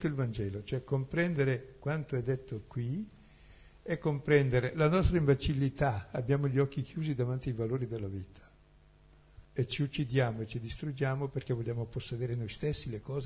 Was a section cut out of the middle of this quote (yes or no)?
yes